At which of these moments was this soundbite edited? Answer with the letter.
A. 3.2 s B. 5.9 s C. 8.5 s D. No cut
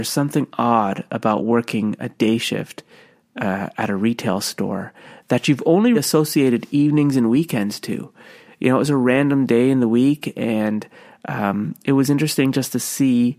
B